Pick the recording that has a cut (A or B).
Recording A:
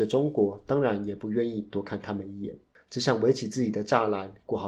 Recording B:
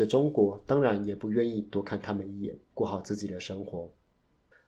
B